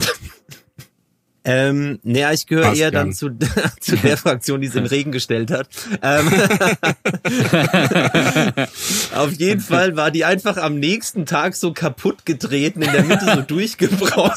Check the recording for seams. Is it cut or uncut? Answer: uncut